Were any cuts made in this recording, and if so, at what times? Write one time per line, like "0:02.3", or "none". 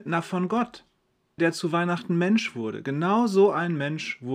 0:01.4